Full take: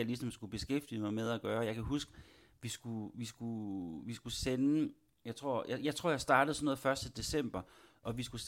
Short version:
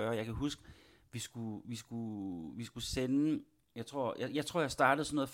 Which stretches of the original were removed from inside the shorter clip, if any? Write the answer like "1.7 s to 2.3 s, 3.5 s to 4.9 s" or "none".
none